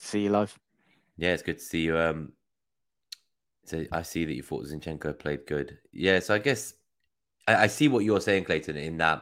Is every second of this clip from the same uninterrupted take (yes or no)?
yes